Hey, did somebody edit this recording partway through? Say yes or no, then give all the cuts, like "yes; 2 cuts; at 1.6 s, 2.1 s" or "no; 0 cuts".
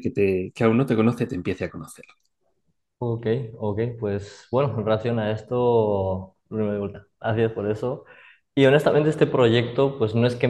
no; 0 cuts